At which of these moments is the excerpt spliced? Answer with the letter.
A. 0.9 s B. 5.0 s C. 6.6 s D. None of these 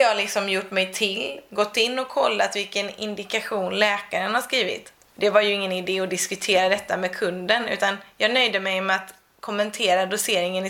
B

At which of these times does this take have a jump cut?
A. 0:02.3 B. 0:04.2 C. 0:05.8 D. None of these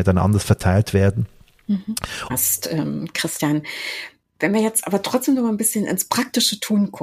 A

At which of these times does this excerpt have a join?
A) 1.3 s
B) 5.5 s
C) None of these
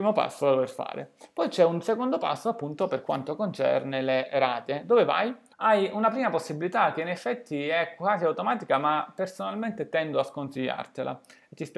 B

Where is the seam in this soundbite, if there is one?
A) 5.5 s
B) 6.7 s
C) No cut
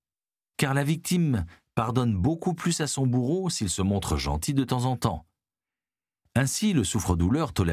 C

